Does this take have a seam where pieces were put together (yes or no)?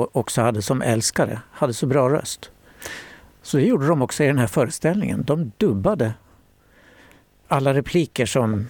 yes